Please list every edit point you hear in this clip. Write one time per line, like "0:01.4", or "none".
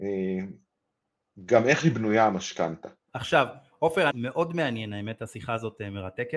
0:03.1
0:04.1